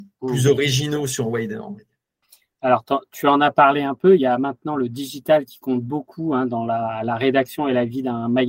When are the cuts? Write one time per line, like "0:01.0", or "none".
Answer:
none